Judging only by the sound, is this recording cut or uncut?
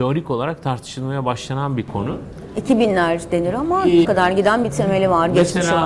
cut